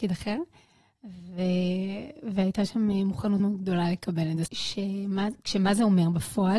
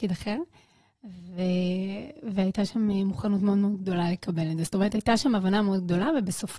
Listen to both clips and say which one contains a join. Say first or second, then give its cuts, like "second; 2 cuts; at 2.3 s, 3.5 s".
first; 2 cuts; at 3.4 s, 4.5 s